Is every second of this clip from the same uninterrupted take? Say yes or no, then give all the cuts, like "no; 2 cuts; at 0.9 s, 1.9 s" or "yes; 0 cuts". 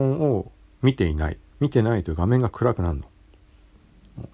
no; 1 cut; at 1.5 s